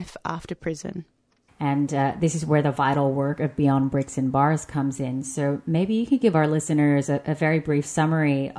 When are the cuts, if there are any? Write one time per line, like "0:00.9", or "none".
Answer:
0:01.5